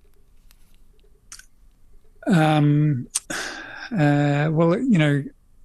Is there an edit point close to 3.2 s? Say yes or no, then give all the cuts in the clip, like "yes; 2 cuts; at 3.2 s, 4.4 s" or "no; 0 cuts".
yes; 1 cut; at 3.2 s